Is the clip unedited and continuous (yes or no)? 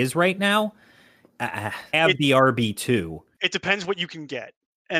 no